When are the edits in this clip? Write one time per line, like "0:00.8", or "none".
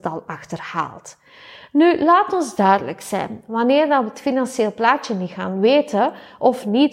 none